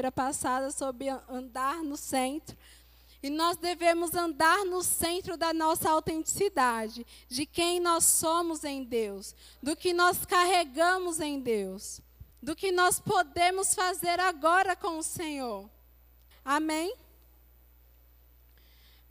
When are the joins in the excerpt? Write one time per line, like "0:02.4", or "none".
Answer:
0:12.3
0:16.3